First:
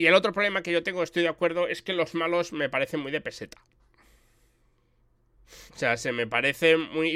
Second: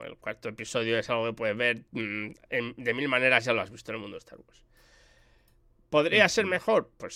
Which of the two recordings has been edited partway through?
first; 1 cut; at 5.7 s

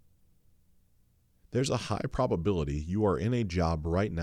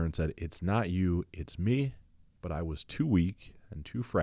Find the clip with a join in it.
second; 1 cut; at 2.3 s

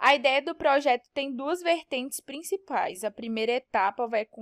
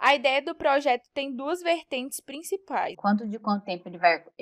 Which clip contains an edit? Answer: second; 1 cut; at 2.9 s

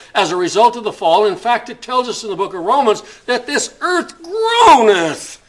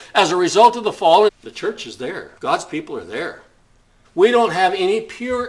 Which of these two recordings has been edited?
second; 3 cuts; at 1.3 s, 2.4 s, 4.0 s

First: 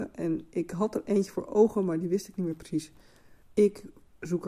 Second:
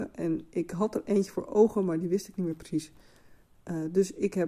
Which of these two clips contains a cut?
first; 1 cut; at 3.4 s

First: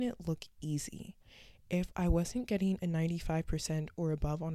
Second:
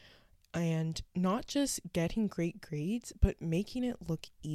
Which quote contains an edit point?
second; 1 cut; at 1.1 s

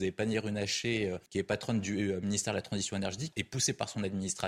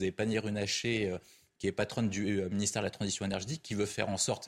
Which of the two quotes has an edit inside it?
first; 2 cuts; at 1.3 s, 3.3 s

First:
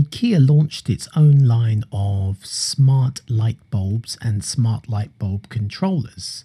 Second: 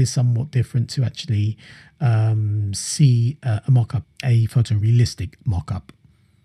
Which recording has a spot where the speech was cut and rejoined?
second; 1 cut; at 4.2 s

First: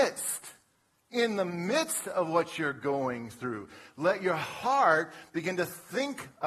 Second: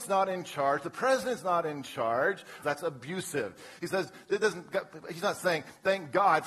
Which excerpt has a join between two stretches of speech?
second; 1 cut; at 2.6 s

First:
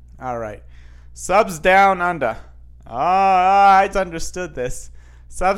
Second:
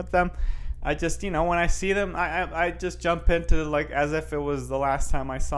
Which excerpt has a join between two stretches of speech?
first; 1 cut; at 3.9 s

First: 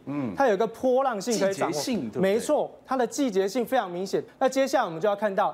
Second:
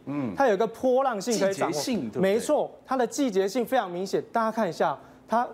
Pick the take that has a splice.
first; 1 cut; at 4.3 s

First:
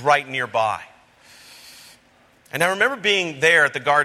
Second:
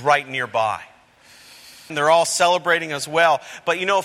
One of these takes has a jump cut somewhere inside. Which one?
second; 1 cut; at 1.9 s

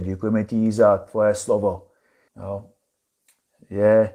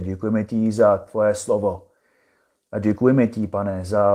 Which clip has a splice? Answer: first; 1 cut; at 2.3 s

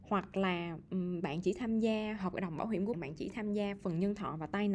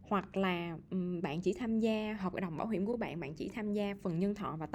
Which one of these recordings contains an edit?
first; 1 cut; at 2.9 s

